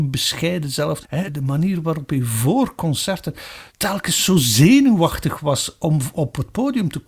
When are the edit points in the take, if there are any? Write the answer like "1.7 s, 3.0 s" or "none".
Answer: 1.0 s, 3.7 s